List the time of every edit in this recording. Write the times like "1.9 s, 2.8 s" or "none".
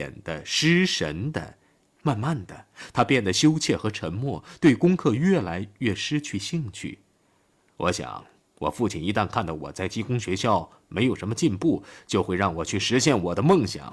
1.8 s